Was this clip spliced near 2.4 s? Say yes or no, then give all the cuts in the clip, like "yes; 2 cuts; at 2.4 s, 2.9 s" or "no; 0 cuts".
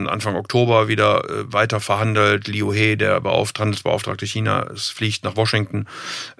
no; 0 cuts